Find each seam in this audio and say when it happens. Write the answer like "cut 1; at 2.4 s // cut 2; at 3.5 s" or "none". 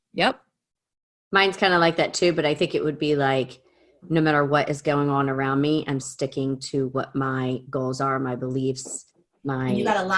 cut 1; at 6.0 s